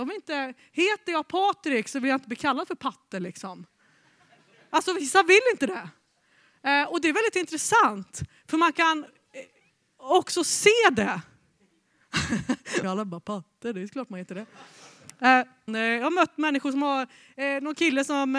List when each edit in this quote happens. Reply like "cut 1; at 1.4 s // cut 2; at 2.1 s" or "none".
cut 1; at 12.8 s // cut 2; at 15.7 s